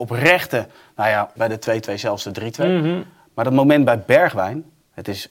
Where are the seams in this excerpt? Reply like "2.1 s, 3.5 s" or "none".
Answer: 1.4 s